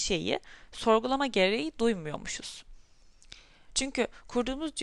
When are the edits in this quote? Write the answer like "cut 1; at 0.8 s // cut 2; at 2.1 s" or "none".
cut 1; at 3.7 s